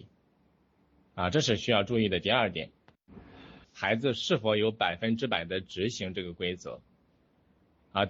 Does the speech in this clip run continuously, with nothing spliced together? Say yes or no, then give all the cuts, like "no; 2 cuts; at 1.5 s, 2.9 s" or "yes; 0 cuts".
no; 1 cut; at 3.6 s